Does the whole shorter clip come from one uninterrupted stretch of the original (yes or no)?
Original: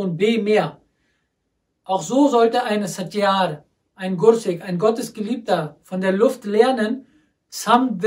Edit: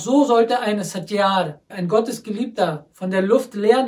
no